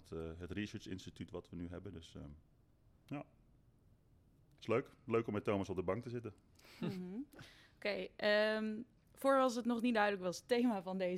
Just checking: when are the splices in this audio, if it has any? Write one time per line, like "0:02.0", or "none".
none